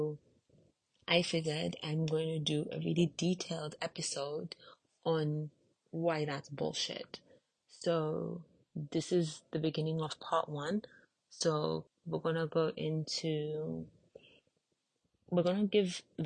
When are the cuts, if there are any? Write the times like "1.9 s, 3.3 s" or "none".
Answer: 11.9 s